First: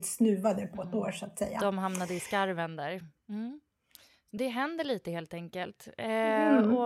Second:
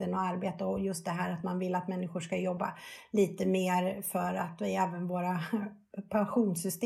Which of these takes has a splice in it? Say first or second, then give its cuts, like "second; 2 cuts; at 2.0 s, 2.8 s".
first; 1 cut; at 3.2 s